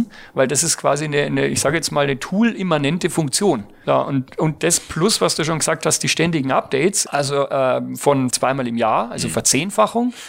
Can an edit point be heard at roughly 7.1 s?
yes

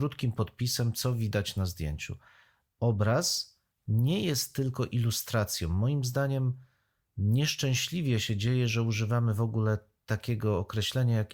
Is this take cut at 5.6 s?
no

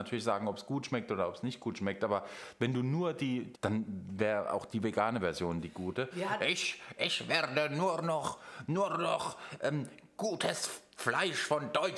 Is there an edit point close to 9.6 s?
no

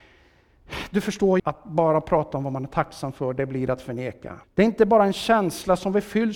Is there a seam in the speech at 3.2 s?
no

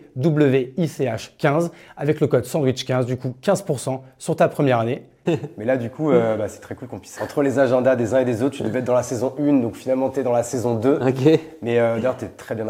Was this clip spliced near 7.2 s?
yes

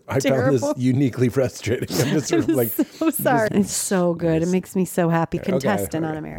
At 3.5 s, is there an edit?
yes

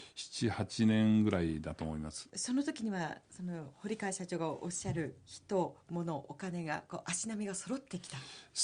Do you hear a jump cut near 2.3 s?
yes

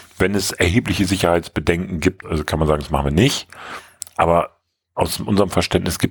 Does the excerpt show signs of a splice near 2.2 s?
yes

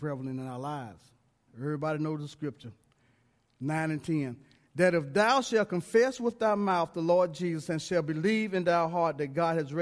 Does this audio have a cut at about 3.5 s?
no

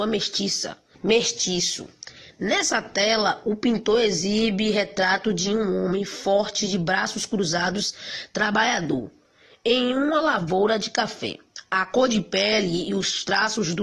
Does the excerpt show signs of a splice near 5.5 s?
no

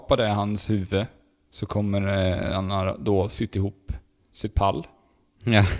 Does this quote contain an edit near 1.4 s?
no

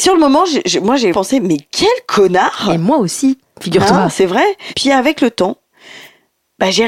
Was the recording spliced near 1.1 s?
yes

